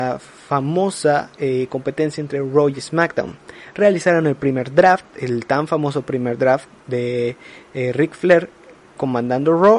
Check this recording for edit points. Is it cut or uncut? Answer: uncut